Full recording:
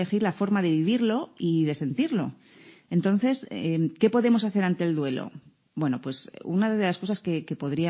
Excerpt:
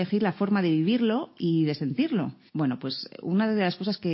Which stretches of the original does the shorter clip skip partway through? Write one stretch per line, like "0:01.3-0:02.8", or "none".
0:02.5-0:05.7